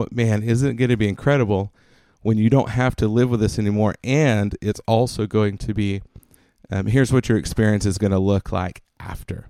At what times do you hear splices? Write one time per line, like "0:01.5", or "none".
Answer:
none